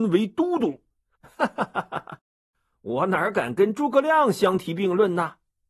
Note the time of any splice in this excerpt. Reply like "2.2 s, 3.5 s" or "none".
1.2 s